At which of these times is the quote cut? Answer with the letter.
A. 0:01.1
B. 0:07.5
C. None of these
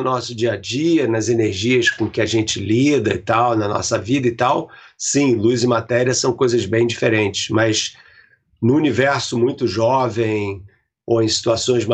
C